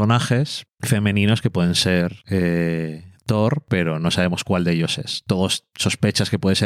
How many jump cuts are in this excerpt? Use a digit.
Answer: 0